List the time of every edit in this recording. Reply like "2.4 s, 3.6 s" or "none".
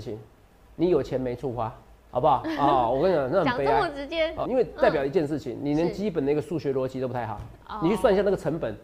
4.4 s